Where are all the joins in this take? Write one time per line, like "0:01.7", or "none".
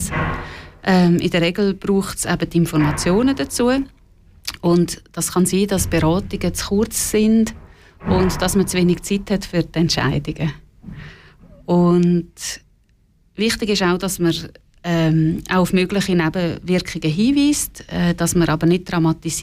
none